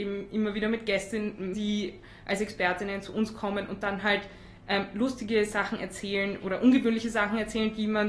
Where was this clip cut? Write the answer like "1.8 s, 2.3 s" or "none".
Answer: 1.5 s